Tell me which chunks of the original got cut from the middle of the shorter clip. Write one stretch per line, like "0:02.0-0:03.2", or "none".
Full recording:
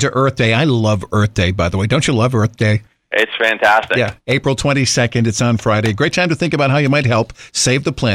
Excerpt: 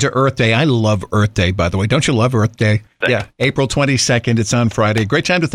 0:03.0-0:03.9